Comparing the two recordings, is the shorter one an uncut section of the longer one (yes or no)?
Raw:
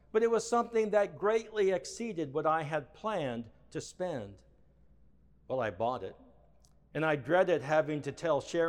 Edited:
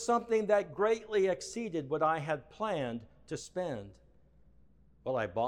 yes